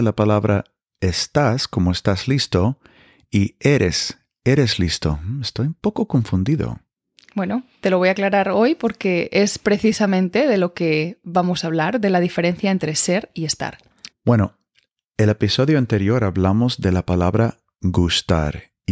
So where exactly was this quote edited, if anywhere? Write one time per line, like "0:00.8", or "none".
0:14.1